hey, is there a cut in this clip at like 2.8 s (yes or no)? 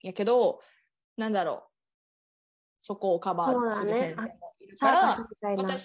yes